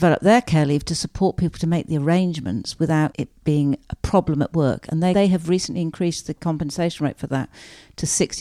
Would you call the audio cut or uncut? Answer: cut